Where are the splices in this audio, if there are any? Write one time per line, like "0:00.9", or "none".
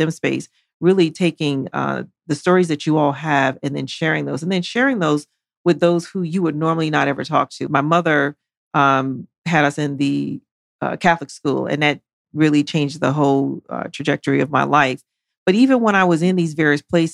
0:07.7